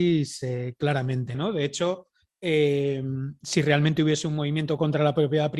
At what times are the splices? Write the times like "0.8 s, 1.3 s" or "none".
1.3 s